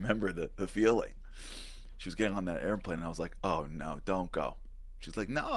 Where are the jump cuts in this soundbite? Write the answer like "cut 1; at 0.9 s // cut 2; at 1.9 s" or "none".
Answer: none

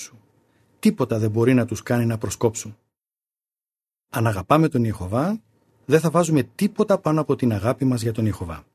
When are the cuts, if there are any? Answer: cut 1; at 5.7 s

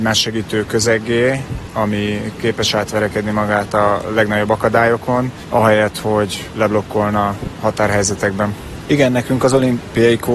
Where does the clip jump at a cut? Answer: cut 1; at 8.8 s

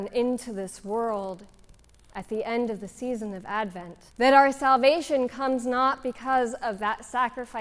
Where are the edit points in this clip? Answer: cut 1; at 4.1 s

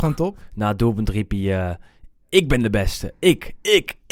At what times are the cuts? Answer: none

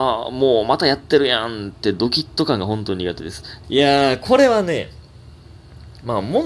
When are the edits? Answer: cut 1; at 3.6 s

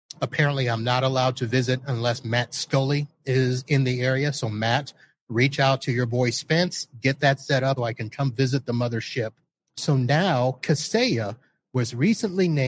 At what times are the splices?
cut 1; at 7.8 s // cut 2; at 9.6 s

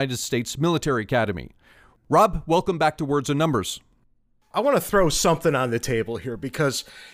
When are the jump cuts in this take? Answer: cut 1; at 2.0 s

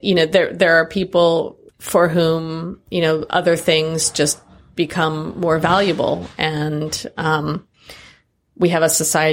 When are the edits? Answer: cut 1; at 1.7 s

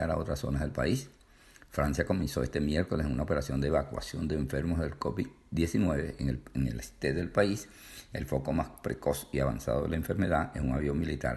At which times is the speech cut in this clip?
none

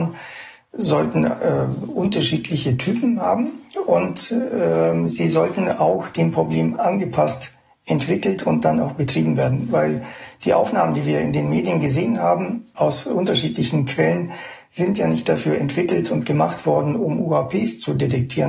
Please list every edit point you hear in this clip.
none

